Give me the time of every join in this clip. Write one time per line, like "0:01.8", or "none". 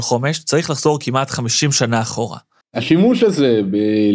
0:02.6